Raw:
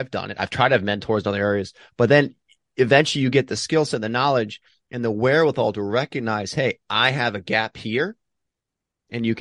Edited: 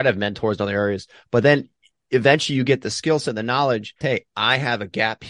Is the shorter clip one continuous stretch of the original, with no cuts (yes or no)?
no